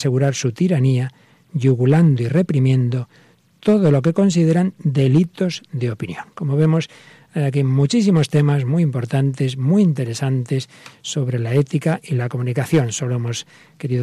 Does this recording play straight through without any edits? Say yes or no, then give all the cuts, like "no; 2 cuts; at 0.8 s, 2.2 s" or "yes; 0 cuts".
yes; 0 cuts